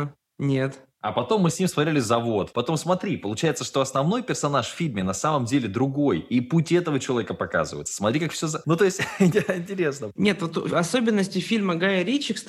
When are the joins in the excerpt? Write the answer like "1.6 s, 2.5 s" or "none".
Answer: 2.5 s, 7.9 s